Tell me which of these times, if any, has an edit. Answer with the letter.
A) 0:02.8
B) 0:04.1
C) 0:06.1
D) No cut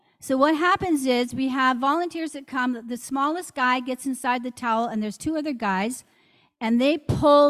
D